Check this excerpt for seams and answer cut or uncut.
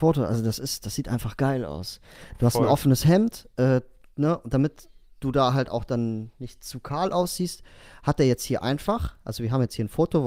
uncut